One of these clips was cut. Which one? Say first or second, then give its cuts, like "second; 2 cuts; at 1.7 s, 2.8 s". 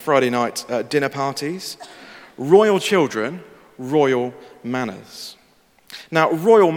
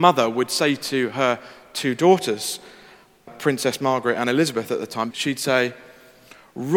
second; 2 cuts; at 3.3 s, 5.1 s